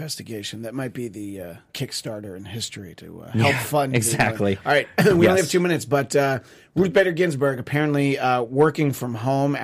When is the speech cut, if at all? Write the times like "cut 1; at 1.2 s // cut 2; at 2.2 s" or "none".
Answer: cut 1; at 1.7 s